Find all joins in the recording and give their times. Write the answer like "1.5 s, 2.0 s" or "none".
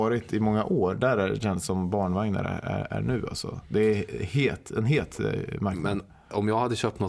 none